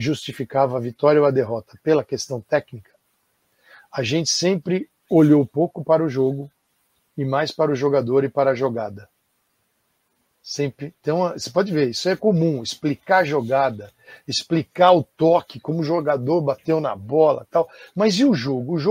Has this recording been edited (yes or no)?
no